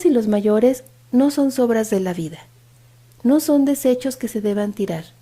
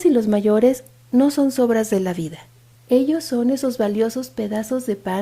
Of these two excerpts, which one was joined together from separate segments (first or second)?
second